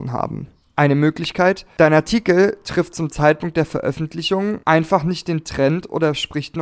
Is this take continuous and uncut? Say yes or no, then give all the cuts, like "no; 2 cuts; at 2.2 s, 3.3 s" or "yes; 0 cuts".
yes; 0 cuts